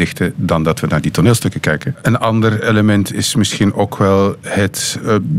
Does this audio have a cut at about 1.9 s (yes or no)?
yes